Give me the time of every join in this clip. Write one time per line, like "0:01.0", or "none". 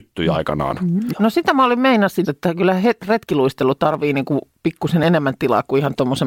0:01.1
0:02.2